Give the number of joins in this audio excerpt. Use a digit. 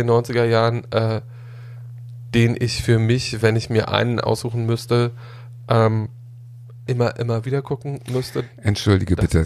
1